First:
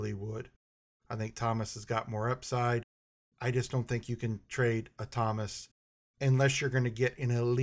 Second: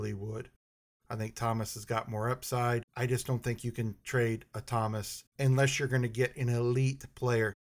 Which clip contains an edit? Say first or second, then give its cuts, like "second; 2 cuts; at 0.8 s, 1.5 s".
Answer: second; 2 cuts; at 2.9 s, 5.3 s